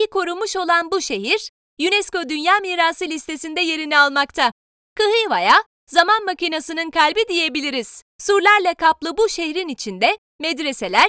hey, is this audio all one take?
no; 1 cut; at 8.1 s

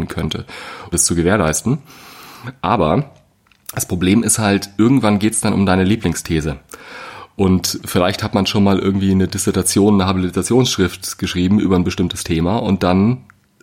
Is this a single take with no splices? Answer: no; 1 cut; at 0.9 s

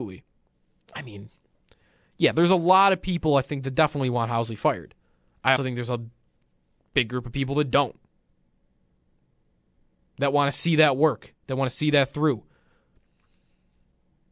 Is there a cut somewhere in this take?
yes; 1 cut; at 5.6 s

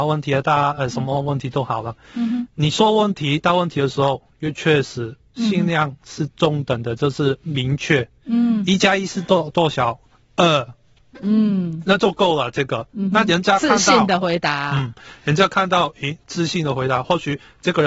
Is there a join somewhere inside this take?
no; 0 cuts

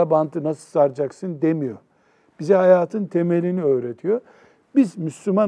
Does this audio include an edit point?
no; 0 cuts

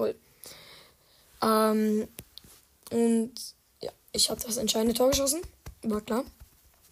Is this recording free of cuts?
yes; 0 cuts

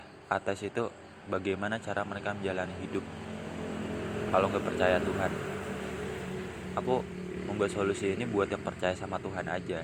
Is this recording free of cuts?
yes; 0 cuts

